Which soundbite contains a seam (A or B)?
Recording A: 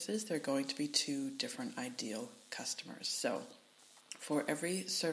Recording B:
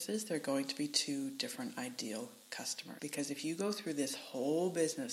B